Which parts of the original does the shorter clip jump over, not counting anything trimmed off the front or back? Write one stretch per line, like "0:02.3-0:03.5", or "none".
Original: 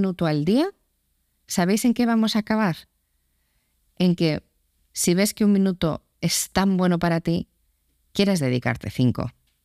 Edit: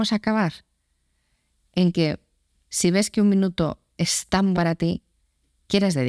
0:06.8-0:07.0